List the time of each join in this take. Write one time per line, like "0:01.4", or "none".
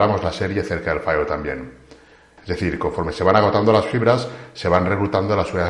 0:02.4